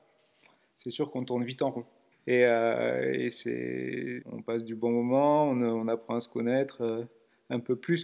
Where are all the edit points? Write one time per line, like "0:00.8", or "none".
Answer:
none